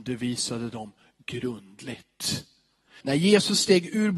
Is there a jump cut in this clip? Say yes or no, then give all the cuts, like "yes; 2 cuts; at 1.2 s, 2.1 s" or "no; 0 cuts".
yes; 1 cut; at 3.0 s